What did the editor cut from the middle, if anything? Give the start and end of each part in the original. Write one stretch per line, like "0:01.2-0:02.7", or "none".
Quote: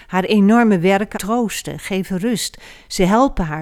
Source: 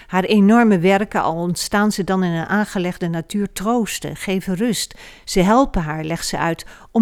0:01.1-0:03.5